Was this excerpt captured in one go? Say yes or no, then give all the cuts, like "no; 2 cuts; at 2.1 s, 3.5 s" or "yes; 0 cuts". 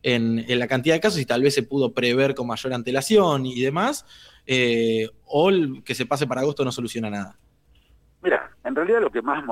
yes; 0 cuts